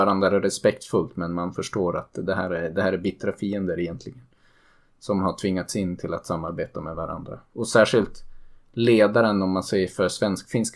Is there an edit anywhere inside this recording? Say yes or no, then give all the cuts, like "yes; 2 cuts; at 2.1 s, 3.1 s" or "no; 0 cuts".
no; 0 cuts